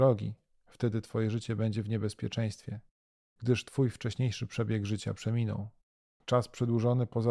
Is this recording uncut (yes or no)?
no